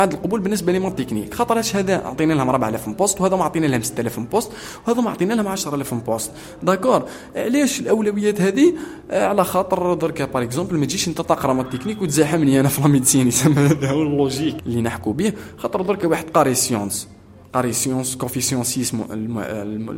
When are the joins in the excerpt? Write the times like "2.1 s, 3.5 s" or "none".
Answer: 14.6 s